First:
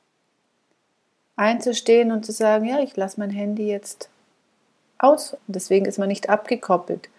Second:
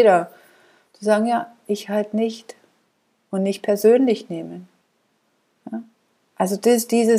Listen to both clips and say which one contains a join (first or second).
first